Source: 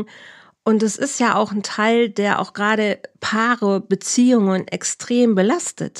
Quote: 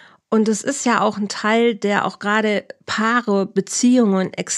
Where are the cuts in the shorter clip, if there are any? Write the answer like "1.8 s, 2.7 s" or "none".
none